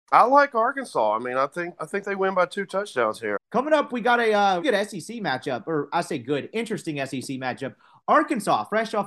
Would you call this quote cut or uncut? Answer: cut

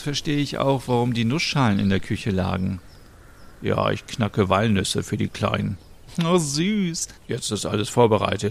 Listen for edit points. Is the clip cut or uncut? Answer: cut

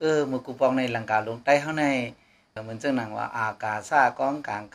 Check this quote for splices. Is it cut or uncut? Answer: cut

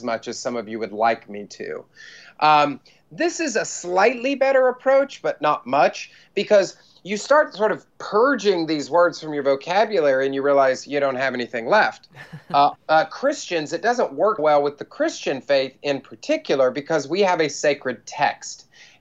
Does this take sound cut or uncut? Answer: cut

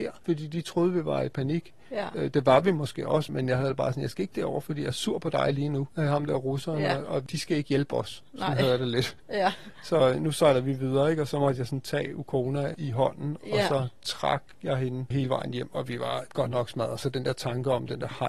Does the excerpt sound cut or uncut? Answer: cut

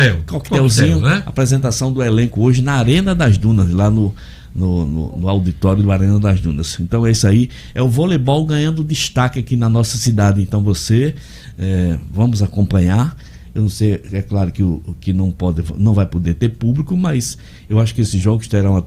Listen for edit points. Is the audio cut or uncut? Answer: uncut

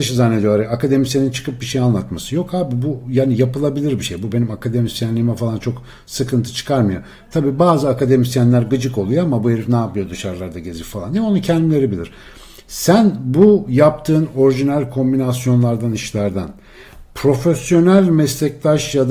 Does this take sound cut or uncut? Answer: uncut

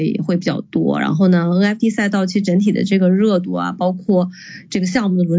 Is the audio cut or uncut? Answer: uncut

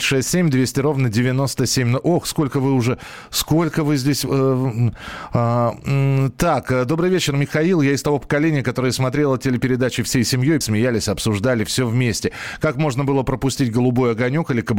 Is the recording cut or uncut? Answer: cut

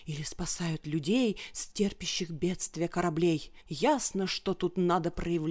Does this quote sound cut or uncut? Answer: cut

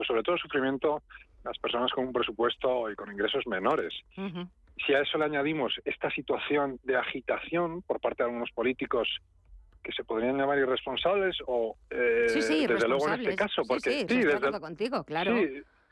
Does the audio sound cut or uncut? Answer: cut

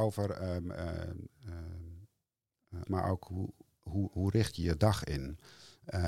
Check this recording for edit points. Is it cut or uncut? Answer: cut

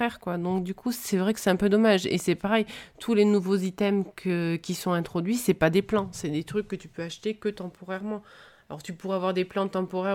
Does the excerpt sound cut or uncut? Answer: uncut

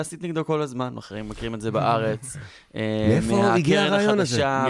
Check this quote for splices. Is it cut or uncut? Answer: uncut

